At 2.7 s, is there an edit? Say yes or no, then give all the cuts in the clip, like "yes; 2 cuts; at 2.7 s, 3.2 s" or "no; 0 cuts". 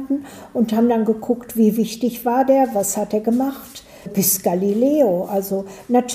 no; 1 cut; at 4.1 s